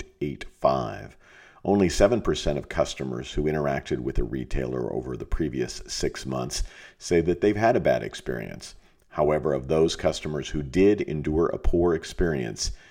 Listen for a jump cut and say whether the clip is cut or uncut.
uncut